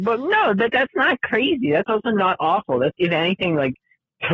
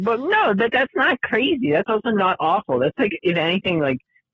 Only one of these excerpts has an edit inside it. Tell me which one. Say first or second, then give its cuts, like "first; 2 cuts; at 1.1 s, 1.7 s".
first; 1 cut; at 2.9 s